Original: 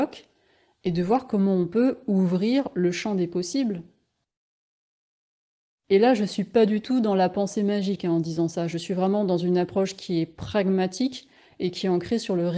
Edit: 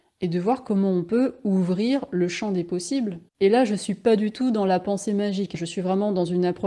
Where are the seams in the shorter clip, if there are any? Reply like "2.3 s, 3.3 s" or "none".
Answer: 3.3 s, 5.5 s